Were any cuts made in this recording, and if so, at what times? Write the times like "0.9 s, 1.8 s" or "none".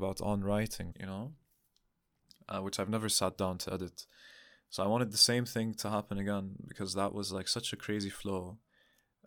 0.9 s

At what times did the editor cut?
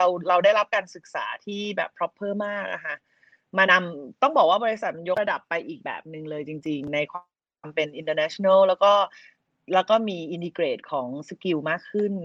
3.7 s

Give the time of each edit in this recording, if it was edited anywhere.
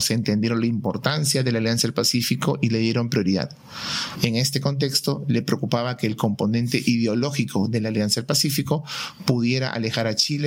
4.2 s

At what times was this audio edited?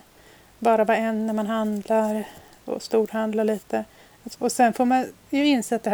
4.3 s

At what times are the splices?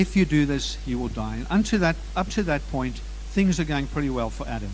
none

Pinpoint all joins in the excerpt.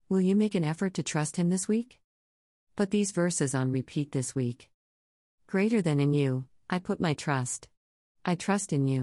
6.6 s

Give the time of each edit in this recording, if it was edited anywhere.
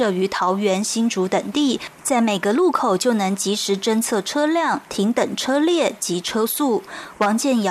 none

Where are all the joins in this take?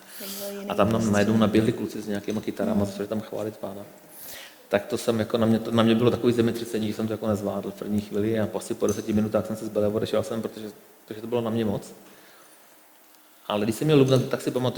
none

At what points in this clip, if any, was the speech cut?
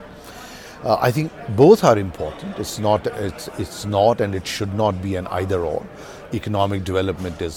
none

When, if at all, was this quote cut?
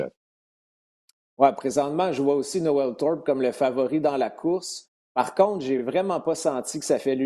none

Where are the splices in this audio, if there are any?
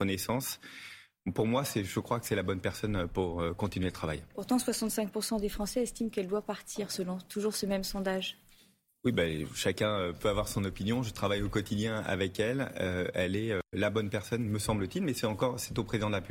none

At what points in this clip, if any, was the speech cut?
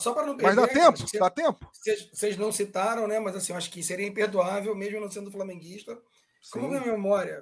none

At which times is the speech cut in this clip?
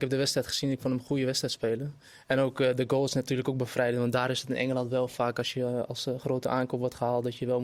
none

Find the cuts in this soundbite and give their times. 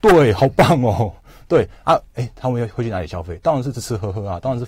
2.1 s, 3.7 s

